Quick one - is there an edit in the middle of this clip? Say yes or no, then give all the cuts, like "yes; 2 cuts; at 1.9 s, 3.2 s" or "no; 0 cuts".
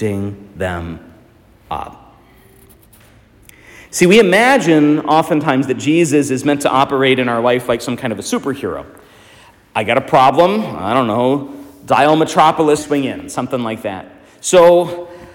yes; 1 cut; at 12.8 s